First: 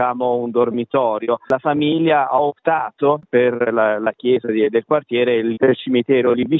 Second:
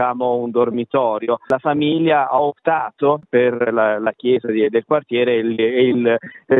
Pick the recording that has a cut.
first; 1 cut; at 5.6 s

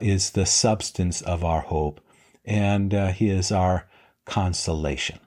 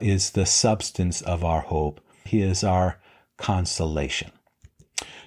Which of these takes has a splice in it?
second; 1 cut; at 2.3 s

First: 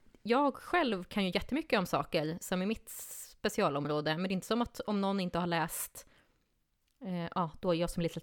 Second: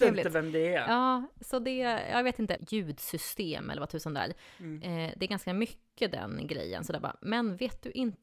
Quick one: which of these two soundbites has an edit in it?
second; 1 cut; at 2.6 s

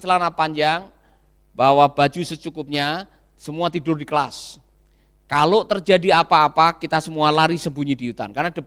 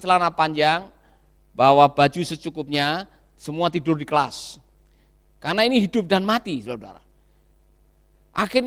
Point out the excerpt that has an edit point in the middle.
second; 1 cut; at 5.2 s

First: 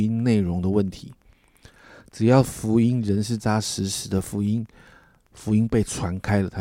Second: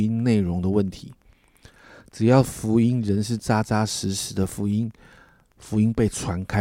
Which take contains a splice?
first; 1 cut; at 3.4 s

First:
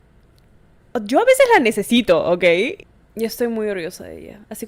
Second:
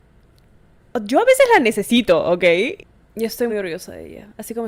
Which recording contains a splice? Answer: second; 1 cut; at 3.5 s

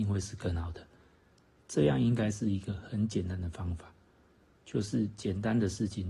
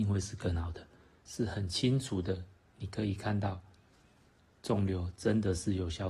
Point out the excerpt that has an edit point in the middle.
second; 1 cut; at 1.2 s

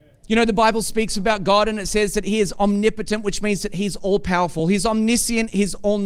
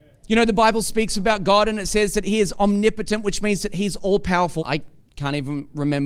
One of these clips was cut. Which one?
second; 1 cut; at 4.6 s

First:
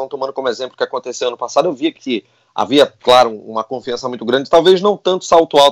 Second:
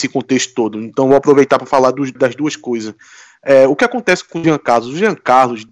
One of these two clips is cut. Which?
second; 1 cut; at 2.2 s

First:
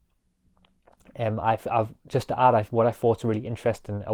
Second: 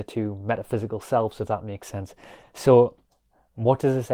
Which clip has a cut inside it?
second; 1 cut; at 2.4 s

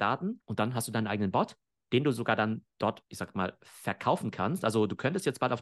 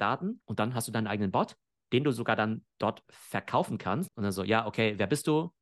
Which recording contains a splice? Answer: second; 2 cuts; at 3.0 s, 4.1 s

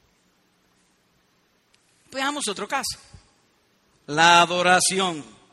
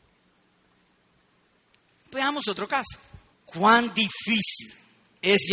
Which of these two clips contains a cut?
second; 1 cut; at 3.3 s

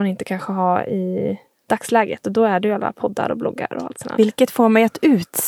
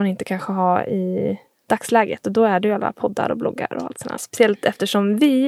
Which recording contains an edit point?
second; 1 cut; at 4.2 s

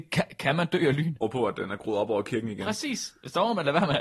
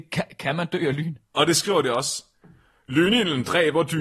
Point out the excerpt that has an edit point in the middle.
first; 1 cut; at 1.2 s

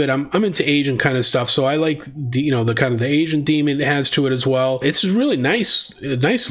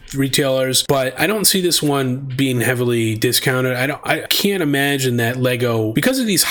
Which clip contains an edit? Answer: second; 1 cut; at 4.3 s

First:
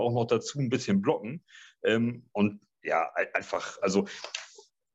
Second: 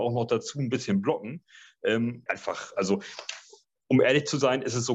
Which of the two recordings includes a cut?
second; 1 cut; at 2.3 s

